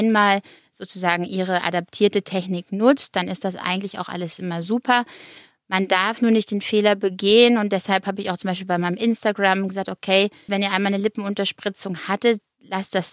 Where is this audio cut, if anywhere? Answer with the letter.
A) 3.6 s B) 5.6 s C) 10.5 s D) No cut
C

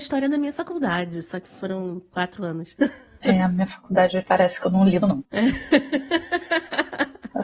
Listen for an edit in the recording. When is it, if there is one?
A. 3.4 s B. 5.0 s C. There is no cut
B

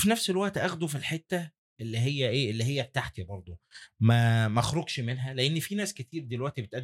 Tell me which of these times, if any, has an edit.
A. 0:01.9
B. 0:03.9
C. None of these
C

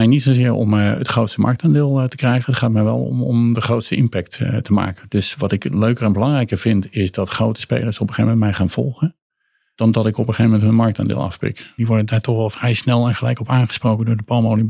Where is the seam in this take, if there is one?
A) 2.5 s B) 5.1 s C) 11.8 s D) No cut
C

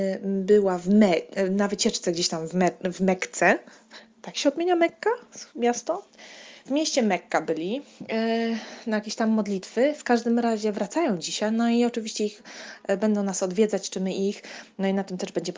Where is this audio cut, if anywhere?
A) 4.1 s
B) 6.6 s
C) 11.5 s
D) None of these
D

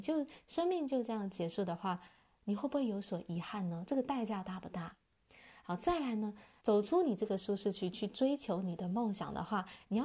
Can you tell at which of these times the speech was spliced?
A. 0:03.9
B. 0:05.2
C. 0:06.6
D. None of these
C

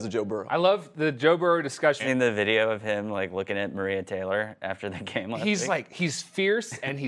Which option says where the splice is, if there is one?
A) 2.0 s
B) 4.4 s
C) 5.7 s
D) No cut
A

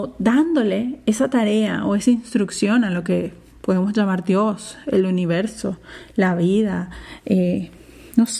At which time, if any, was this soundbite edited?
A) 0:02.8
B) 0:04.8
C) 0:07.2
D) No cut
D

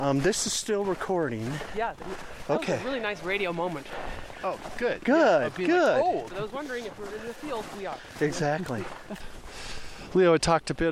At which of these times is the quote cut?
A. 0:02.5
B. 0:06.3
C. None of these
B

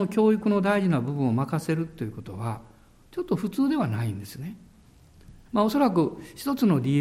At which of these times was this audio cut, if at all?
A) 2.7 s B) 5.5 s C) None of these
B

